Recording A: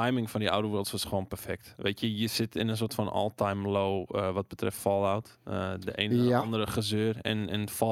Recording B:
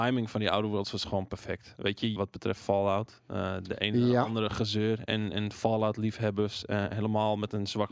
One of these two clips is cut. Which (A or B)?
B